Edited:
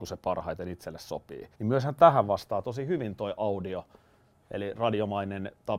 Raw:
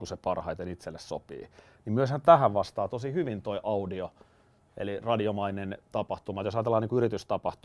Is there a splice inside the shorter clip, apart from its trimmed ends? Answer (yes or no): yes